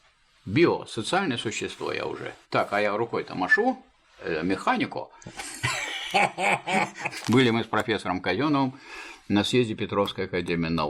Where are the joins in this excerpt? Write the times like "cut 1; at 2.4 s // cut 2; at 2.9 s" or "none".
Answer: cut 1; at 2.4 s // cut 2; at 7.2 s